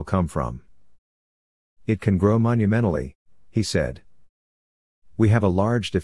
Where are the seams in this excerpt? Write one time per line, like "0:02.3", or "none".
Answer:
none